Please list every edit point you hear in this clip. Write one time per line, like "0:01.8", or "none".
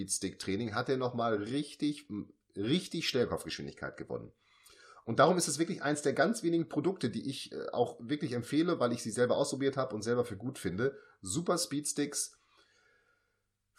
none